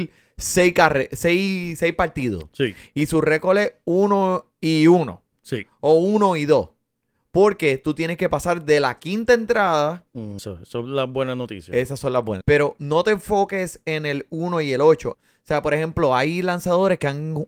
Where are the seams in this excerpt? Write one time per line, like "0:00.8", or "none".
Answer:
0:10.4
0:12.4
0:15.1